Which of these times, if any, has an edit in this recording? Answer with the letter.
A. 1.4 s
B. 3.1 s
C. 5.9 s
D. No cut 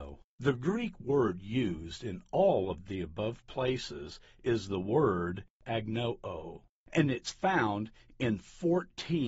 D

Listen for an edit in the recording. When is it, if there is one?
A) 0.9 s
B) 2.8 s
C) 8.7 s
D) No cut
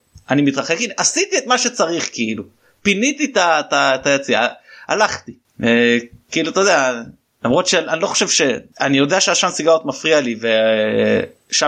C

